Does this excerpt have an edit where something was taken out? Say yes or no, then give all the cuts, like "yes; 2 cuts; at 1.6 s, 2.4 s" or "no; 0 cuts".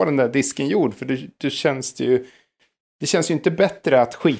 no; 0 cuts